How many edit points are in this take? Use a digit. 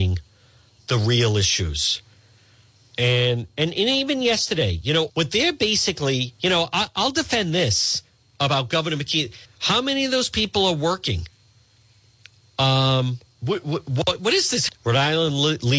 3